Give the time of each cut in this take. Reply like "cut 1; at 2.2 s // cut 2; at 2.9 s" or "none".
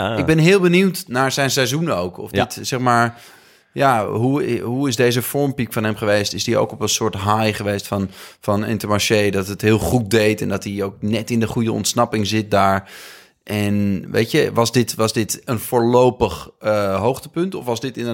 none